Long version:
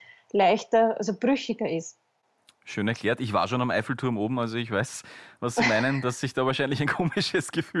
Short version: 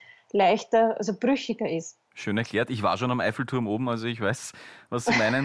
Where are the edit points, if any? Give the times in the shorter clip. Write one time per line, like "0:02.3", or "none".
0:02.1

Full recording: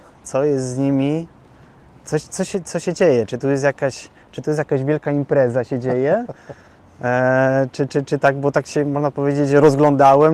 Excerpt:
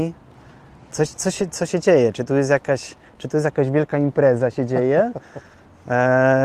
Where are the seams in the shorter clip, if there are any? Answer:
none

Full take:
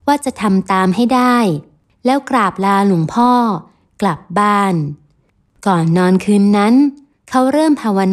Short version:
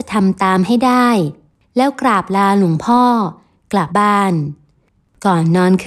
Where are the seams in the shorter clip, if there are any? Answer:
0:03.9

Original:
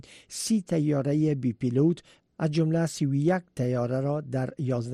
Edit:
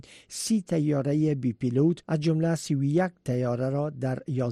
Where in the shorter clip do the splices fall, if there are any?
0:02.0

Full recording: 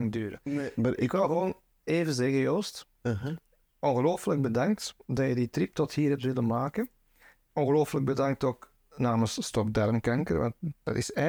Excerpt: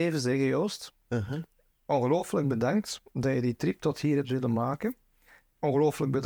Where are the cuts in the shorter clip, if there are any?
none

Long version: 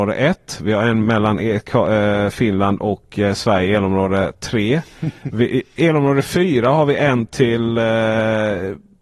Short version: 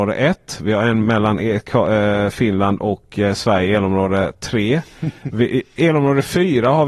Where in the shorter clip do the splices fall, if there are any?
none

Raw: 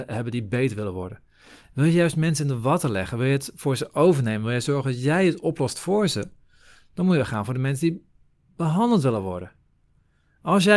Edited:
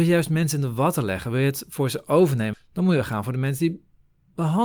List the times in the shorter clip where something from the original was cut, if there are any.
0:02.5

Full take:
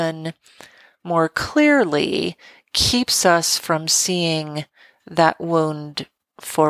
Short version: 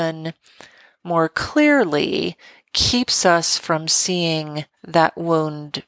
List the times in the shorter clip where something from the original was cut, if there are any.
0:04.7

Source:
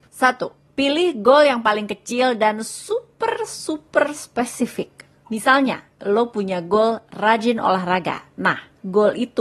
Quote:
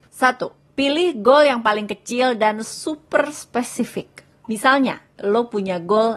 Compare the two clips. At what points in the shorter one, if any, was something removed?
0:02.6

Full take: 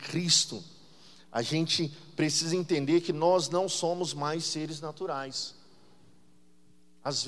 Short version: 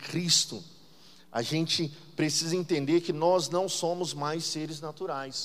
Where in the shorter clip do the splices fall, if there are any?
none

